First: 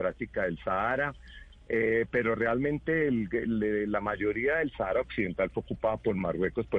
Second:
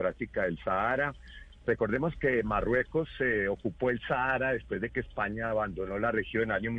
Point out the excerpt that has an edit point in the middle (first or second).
second